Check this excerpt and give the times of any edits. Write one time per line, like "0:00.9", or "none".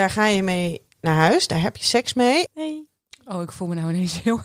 0:02.5